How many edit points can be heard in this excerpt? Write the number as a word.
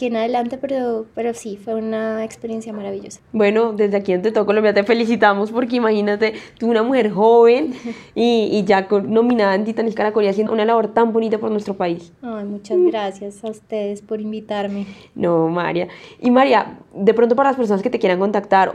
one